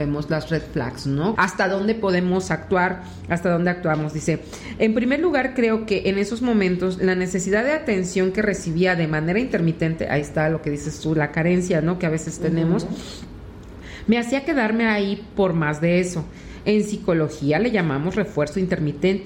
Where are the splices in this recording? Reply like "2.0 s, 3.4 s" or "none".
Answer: 1.4 s